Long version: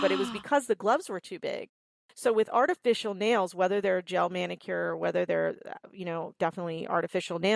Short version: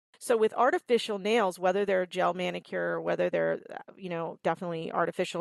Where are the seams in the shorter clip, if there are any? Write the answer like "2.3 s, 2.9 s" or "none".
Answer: none